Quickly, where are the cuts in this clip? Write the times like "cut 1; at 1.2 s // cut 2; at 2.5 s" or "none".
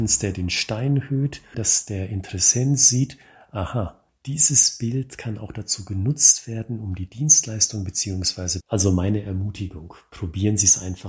cut 1; at 1.5 s // cut 2; at 8.6 s